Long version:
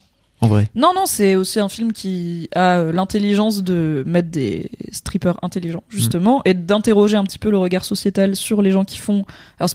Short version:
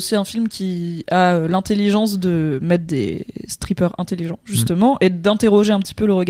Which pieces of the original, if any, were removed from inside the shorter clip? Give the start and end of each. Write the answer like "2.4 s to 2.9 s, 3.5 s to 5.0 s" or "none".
none

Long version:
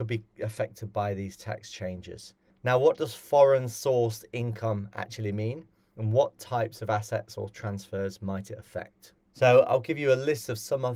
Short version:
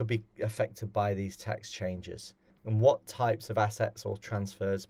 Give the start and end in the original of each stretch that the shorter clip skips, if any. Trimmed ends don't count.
2.6 s to 5.9 s

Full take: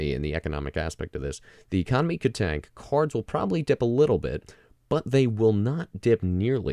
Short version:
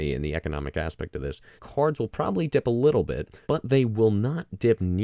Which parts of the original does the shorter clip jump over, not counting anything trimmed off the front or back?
1.6 s to 2.7 s, 4.6 s to 4.9 s

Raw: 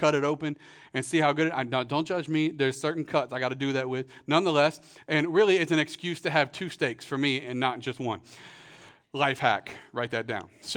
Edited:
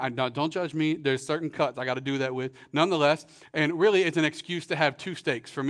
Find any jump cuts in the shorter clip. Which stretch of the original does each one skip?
none

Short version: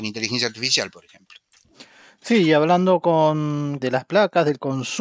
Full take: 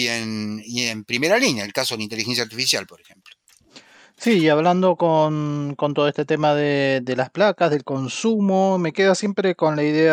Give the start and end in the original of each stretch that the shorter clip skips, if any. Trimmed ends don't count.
5.7 s to 7.0 s

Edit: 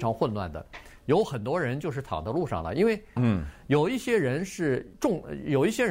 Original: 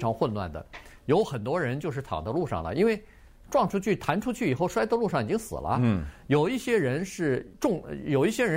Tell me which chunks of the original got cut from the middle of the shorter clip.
3.2 s to 5.8 s

